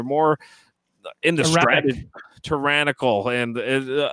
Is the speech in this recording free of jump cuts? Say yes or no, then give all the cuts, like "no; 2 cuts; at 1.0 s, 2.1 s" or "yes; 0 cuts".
yes; 0 cuts